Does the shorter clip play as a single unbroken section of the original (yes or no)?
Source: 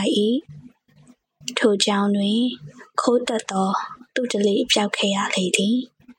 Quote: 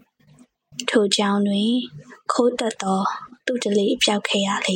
yes